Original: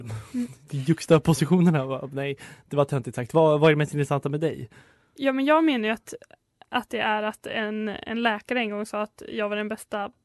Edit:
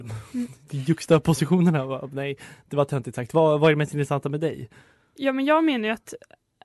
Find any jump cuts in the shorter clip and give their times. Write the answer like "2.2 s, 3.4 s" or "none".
none